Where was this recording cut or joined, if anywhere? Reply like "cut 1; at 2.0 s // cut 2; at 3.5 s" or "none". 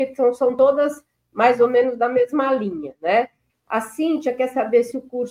cut 1; at 3.5 s